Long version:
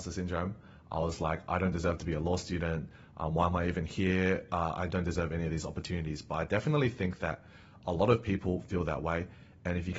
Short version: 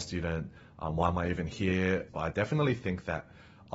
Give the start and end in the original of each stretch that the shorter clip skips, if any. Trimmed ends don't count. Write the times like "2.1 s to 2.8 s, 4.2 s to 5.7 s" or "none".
4.5 s to 6.2 s